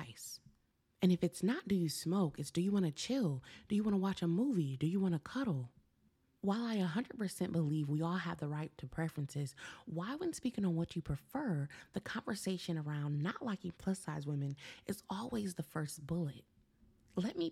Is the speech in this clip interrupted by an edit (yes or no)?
yes